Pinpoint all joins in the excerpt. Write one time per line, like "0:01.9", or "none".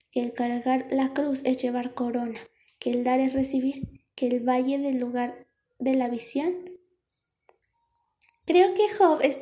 none